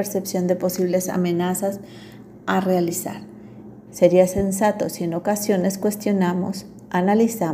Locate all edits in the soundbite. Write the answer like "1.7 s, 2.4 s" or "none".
3.9 s